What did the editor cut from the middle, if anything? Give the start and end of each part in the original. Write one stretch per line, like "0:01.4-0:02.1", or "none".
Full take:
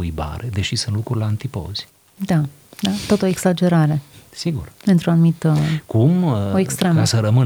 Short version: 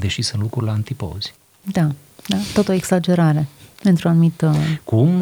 0:04.3-0:04.8